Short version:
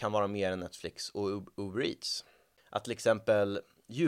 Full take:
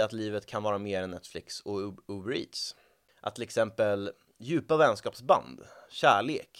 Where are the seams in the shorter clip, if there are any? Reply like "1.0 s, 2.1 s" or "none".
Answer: none